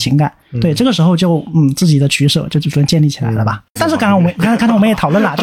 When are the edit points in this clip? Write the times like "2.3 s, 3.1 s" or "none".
3.8 s